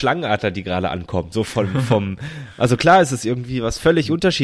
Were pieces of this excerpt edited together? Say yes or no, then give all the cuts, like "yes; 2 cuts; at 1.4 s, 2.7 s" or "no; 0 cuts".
no; 0 cuts